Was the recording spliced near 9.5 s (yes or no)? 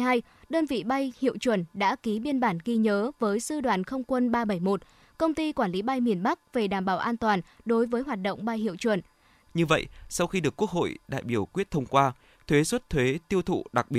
yes